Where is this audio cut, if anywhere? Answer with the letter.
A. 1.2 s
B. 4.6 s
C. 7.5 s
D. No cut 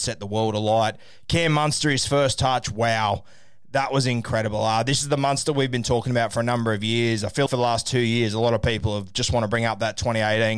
C